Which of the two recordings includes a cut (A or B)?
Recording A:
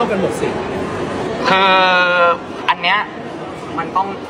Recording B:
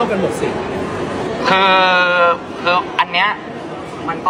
A